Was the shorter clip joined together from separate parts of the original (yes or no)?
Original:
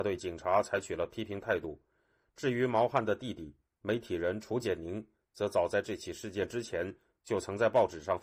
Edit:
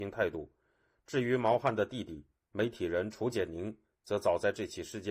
no